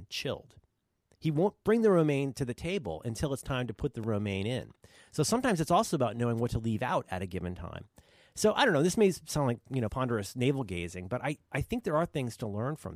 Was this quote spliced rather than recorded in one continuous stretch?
no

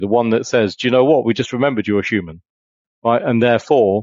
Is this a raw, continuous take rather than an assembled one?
yes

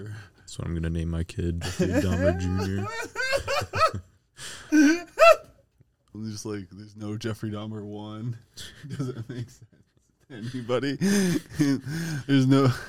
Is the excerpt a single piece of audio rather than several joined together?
no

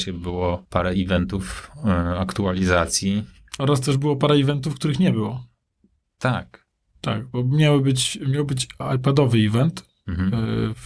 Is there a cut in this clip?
yes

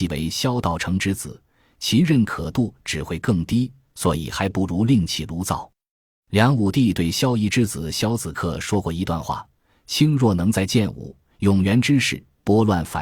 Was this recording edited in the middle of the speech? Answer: no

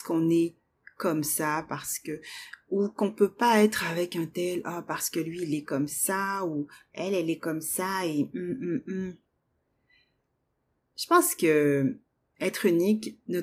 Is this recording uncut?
yes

